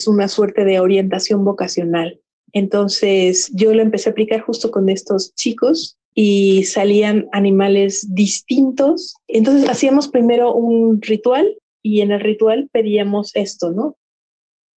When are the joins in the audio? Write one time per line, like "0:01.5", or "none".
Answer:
none

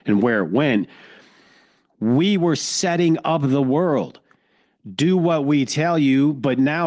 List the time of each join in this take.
none

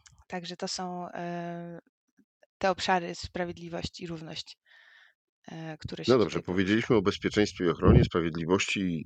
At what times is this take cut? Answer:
none

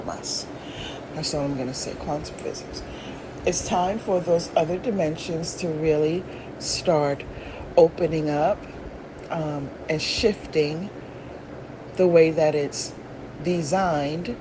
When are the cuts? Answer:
0:01.1

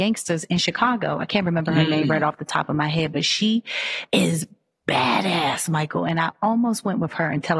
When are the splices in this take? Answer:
none

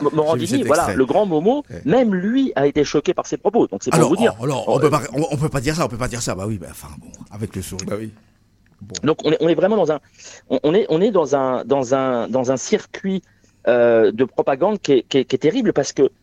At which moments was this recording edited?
0:07.8

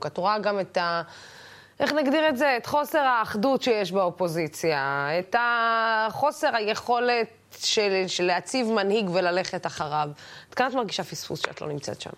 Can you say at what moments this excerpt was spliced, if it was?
0:05.2

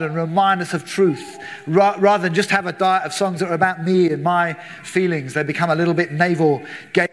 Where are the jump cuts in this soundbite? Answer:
none

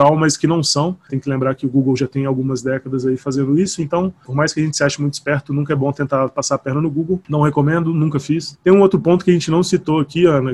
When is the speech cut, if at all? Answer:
0:01.1
0:08.5

